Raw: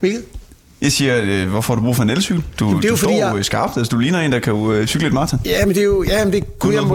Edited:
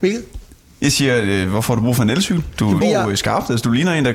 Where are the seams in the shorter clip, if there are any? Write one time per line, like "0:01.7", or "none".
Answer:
0:02.8